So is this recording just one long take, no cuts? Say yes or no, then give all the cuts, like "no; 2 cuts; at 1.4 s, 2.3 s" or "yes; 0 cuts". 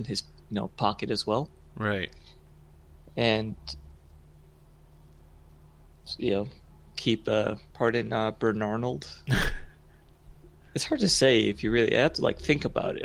no; 1 cut; at 7.7 s